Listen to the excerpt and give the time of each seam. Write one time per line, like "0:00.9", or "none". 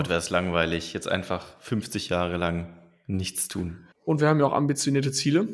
0:03.9